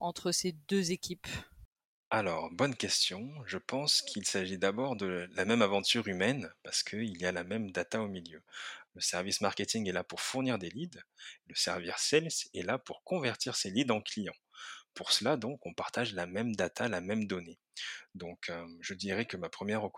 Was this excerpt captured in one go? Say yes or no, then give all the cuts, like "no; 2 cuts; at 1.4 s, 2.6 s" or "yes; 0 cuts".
no; 1 cut; at 8.8 s